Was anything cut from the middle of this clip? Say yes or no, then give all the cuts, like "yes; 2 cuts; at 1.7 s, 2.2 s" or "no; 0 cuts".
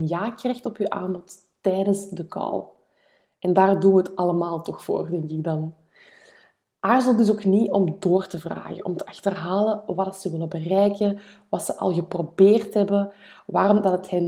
no; 0 cuts